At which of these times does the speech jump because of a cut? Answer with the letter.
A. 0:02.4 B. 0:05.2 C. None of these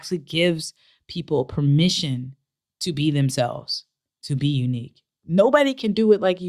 B